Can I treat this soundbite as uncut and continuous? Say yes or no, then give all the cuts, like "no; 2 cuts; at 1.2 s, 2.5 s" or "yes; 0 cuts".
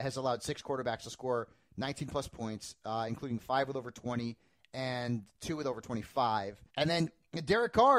no; 1 cut; at 6.7 s